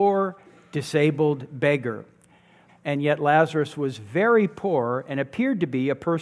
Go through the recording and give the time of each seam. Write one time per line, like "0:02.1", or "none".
0:02.7